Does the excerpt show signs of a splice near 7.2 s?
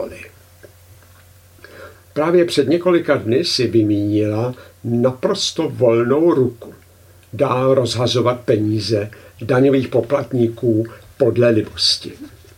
no; 1 cut; at 1.9 s

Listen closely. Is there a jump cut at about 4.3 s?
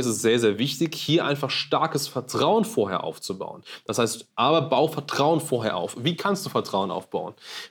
yes; 1 cut; at 4.3 s

